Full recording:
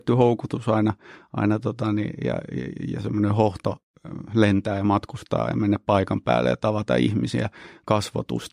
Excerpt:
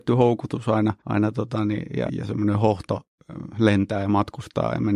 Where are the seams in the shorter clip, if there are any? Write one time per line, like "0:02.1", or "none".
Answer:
0:01.0
0:02.1